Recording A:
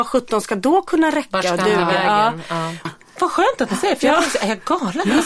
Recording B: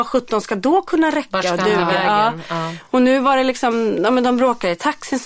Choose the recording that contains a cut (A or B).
A